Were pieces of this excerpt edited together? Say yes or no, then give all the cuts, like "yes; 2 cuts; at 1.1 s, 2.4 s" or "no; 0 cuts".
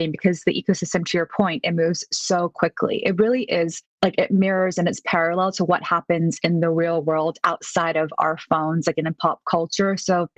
no; 0 cuts